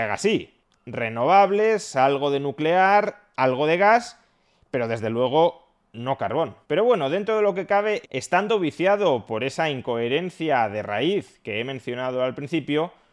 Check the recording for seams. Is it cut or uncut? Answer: cut